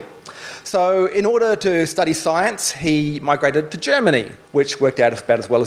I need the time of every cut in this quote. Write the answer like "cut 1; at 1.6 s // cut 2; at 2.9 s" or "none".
cut 1; at 4.4 s